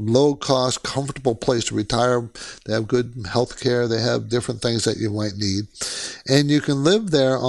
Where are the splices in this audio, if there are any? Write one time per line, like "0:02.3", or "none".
none